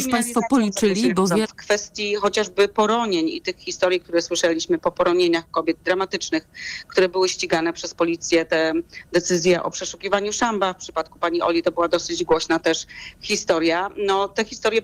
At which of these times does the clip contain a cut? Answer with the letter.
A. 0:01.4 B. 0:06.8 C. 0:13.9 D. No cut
A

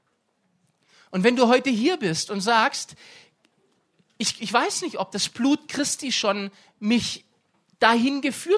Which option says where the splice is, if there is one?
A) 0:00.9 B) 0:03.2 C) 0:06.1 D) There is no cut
D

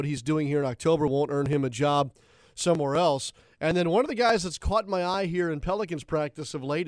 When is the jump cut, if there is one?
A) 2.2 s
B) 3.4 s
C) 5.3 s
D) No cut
B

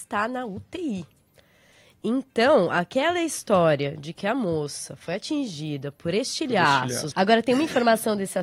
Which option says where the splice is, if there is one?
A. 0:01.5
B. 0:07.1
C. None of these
B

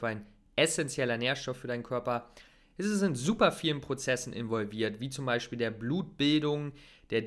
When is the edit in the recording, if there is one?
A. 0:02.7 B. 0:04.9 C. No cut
C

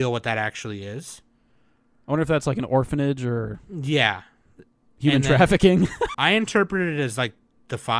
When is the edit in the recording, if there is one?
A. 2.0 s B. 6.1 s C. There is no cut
B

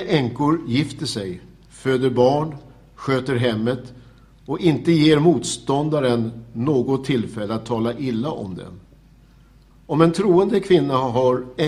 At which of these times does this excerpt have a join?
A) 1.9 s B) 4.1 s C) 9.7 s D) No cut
C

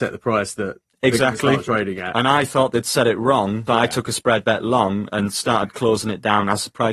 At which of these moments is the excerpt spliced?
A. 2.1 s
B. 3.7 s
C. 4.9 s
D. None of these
B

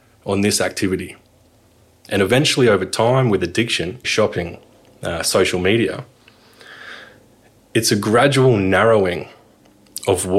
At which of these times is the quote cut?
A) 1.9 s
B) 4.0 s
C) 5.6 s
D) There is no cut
B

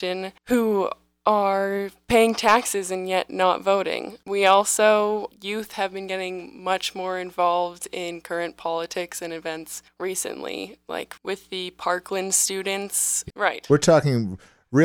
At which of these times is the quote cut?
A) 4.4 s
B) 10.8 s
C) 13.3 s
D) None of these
C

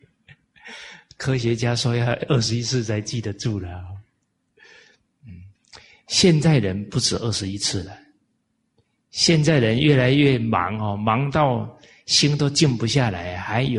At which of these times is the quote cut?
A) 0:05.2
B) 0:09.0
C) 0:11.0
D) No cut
D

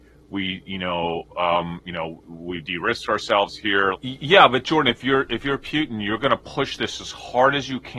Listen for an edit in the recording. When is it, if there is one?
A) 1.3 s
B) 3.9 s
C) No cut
B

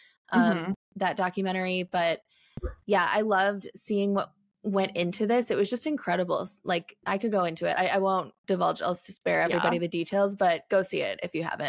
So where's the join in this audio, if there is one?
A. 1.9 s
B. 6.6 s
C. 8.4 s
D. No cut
C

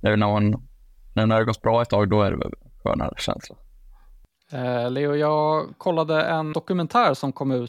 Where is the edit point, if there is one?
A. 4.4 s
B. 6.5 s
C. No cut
B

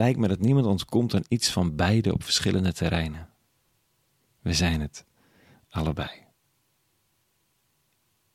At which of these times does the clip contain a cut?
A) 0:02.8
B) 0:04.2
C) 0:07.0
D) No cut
B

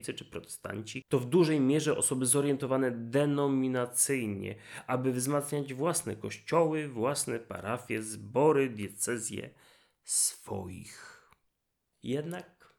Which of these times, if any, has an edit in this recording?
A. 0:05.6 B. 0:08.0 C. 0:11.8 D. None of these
D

